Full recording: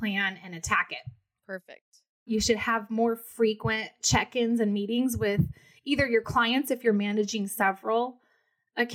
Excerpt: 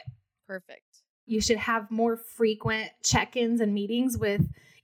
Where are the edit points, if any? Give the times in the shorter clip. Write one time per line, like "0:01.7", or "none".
none

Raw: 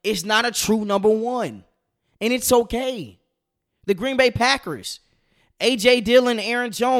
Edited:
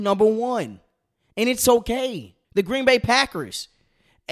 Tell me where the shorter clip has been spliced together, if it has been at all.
0:02.4

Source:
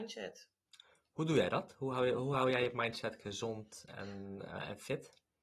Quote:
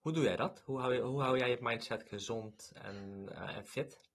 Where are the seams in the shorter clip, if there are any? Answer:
none

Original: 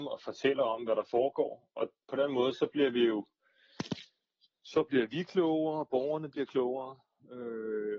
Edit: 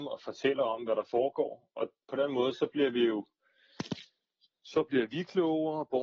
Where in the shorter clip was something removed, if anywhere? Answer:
none

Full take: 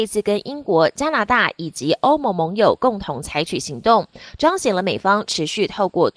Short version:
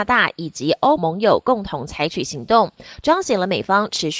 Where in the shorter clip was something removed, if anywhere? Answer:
0:01.0

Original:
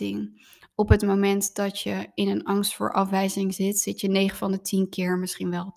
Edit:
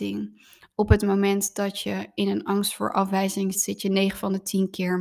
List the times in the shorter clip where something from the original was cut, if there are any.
0:03.5

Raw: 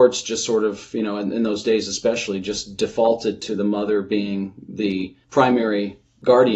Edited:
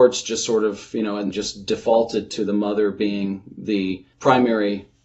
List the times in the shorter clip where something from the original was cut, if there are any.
0:01.3

